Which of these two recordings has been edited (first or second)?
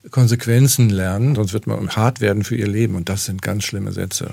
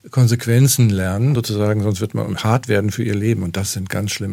first